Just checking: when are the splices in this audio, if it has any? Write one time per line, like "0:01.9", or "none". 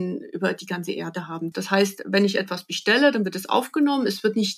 0:01.5